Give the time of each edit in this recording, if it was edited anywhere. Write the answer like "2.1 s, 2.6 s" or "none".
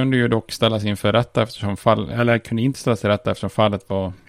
none